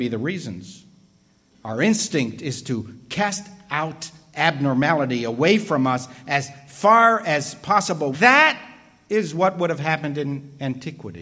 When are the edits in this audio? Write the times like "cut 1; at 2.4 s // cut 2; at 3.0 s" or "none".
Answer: cut 1; at 8.1 s